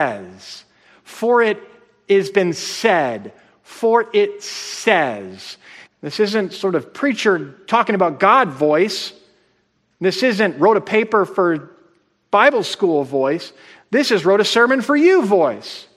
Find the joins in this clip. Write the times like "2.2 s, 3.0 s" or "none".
5.8 s